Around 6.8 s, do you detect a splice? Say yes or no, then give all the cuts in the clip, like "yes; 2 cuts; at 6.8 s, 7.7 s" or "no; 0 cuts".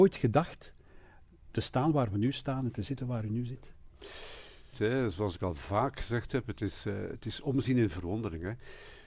no; 1 cut; at 4.7 s